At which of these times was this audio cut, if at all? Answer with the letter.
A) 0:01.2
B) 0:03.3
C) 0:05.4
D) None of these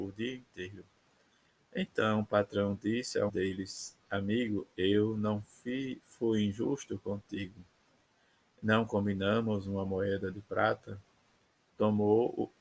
B